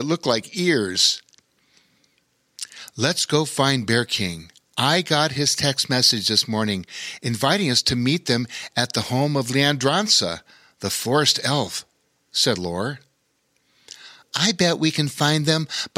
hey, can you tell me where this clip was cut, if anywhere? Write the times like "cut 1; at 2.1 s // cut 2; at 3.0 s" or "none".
none